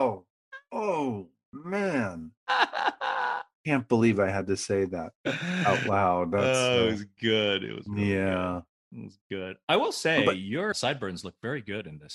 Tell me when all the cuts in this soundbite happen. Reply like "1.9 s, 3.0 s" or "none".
10.7 s

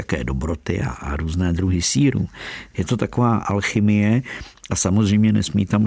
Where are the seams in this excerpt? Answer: 2.7 s

